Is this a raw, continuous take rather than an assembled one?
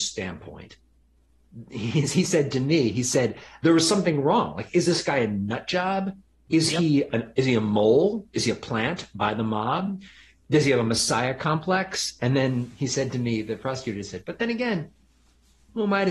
yes; 0 cuts

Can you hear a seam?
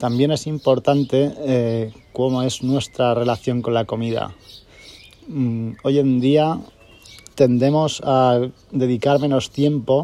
yes; 2 cuts; at 7.3 s, 8.6 s

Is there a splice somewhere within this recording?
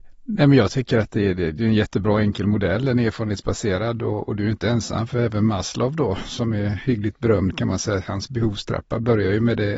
no; 0 cuts

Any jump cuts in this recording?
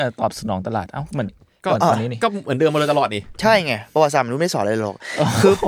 yes; 1 cut; at 1.3 s

